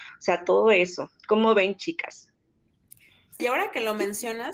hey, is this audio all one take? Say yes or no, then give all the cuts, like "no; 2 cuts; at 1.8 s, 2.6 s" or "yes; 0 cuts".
no; 1 cut; at 3.4 s